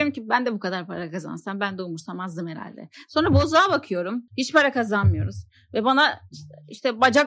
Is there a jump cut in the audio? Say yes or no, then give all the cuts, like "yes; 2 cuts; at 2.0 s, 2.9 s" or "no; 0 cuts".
yes; 1 cut; at 4.3 s